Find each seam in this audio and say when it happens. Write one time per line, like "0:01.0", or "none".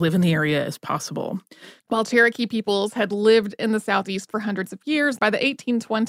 0:01.8
0:05.2